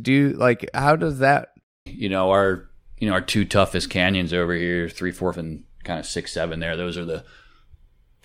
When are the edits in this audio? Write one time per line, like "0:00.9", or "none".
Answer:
0:01.9
0:05.3